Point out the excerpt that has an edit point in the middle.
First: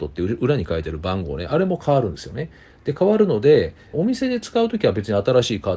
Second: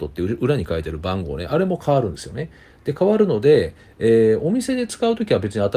first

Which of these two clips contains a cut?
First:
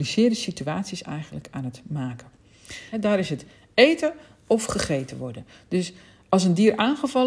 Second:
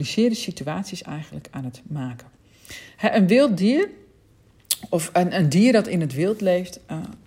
first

